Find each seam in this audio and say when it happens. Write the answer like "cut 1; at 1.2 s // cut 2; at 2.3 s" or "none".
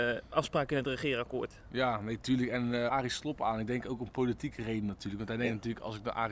cut 1; at 2.9 s